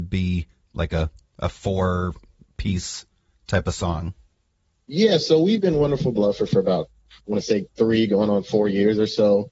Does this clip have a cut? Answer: no; 0 cuts

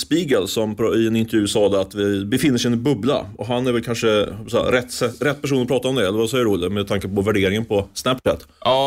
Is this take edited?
no; 0 cuts

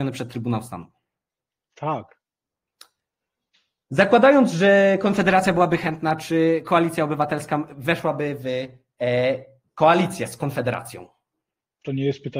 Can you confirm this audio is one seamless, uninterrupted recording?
yes; 0 cuts

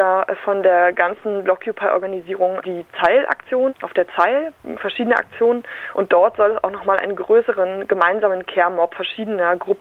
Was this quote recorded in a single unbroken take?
yes; 0 cuts

